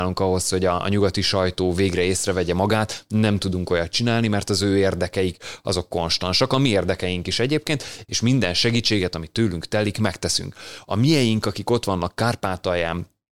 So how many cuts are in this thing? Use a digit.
1